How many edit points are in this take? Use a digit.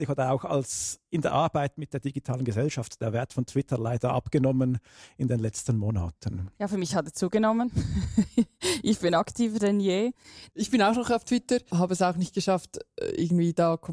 2